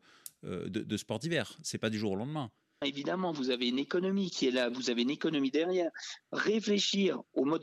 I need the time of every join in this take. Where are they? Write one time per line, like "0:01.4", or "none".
0:02.8
0:06.2